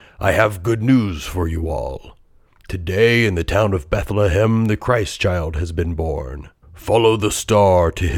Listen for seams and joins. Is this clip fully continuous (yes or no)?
no